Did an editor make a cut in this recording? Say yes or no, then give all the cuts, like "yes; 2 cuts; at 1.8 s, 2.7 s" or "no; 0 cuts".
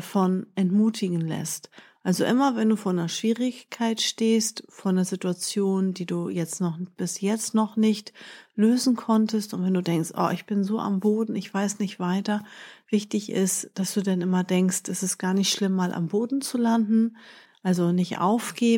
yes; 1 cut; at 17.5 s